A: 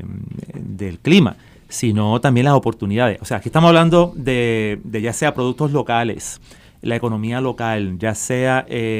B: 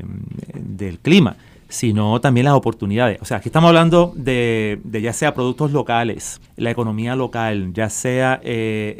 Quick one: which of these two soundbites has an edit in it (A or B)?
B